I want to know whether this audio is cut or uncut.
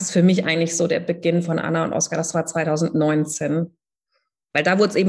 uncut